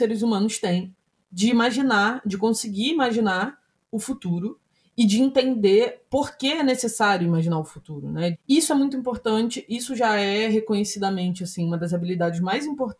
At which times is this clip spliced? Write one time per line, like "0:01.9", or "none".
0:08.3